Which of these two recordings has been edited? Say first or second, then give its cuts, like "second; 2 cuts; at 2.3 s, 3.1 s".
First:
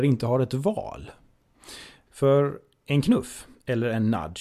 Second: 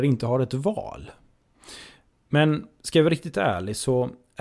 first; 1 cut; at 2.1 s